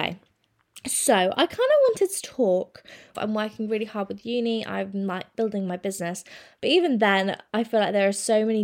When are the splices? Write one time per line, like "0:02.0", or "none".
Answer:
0:03.1